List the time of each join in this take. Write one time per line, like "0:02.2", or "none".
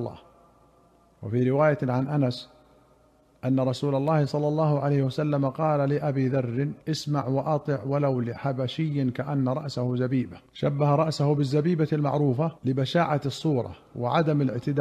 0:06.8
0:10.5
0:12.6